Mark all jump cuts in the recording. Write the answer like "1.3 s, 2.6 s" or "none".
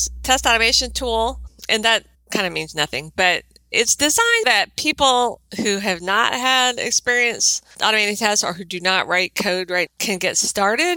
4.4 s, 7.7 s, 9.9 s

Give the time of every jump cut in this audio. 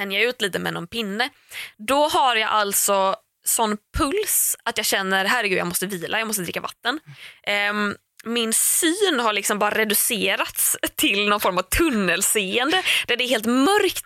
none

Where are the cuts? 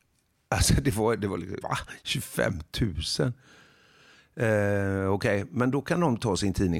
1.6 s

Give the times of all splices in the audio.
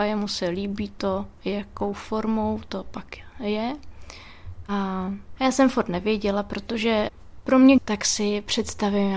4.7 s, 7.8 s

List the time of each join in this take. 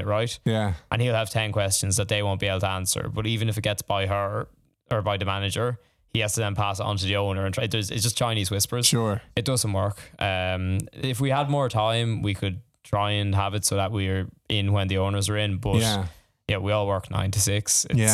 none

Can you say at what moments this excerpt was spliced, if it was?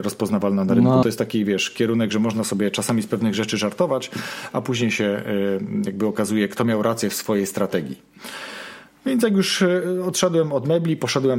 1.0 s

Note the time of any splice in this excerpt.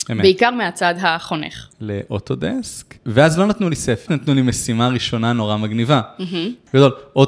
1.7 s, 3.0 s, 4.1 s

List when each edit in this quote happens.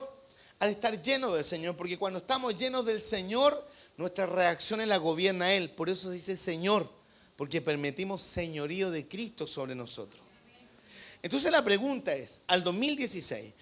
none

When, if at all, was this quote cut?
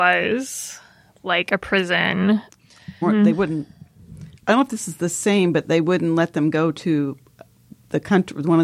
3.0 s, 4.4 s

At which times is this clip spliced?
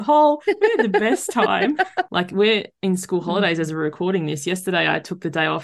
2.1 s

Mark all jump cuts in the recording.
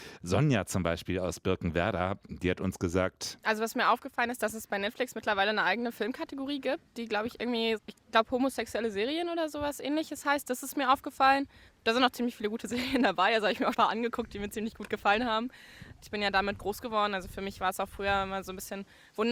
7.8 s, 13.7 s

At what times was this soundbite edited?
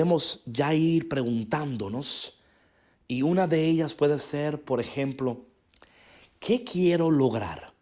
none

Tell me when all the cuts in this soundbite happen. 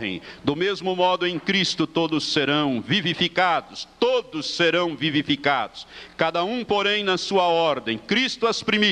none

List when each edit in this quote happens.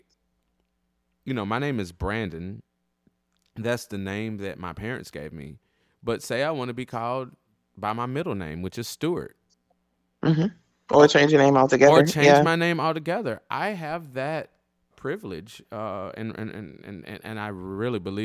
14.9 s

